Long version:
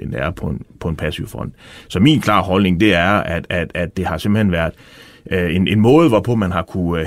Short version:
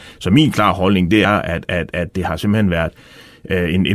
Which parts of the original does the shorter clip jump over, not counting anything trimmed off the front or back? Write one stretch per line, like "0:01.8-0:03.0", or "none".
0:02.9-0:03.1